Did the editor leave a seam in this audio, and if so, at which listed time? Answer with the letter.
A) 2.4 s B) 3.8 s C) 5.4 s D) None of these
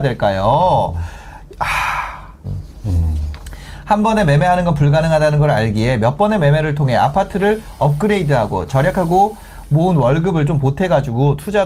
A